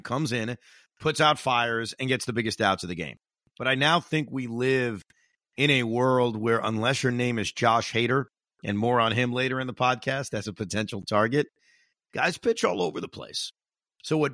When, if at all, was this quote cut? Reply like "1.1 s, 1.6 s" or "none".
none

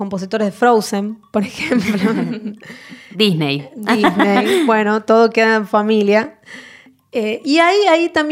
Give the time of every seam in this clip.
none

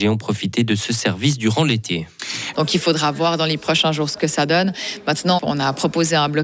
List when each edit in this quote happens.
2.5 s, 5.4 s

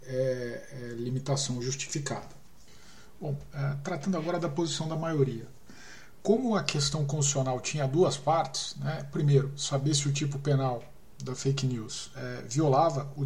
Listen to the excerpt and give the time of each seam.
none

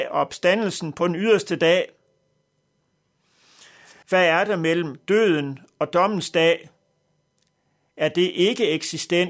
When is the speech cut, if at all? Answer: 4.0 s

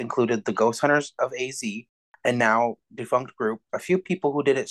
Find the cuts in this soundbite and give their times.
3.7 s

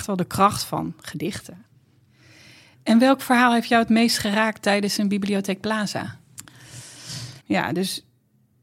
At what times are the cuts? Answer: 7.4 s

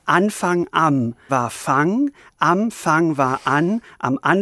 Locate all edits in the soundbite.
1.3 s

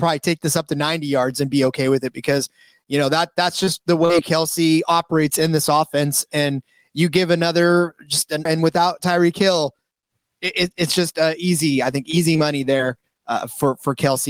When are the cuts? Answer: 8.5 s

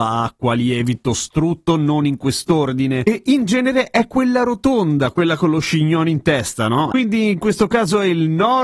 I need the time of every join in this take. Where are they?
6.9 s

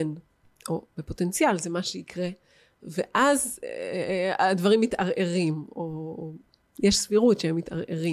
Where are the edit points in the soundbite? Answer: none

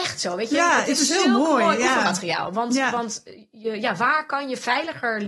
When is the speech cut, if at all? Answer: none

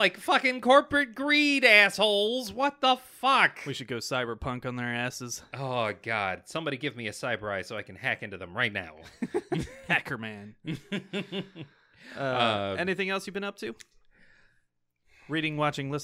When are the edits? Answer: none

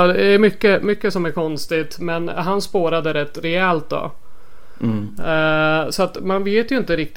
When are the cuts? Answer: none

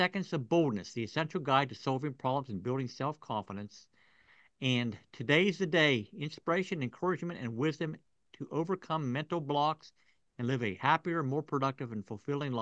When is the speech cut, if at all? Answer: none

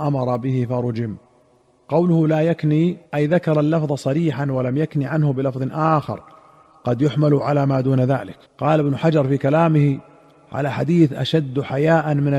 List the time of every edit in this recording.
3.1 s, 8.5 s

